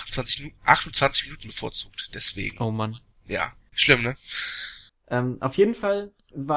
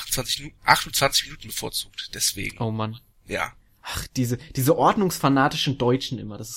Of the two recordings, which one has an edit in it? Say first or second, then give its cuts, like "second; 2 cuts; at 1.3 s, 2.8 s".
first; 2 cuts; at 3.7 s, 4.9 s